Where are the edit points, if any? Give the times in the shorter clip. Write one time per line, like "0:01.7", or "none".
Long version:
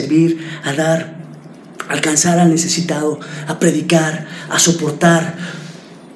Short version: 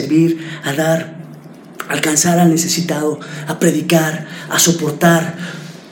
none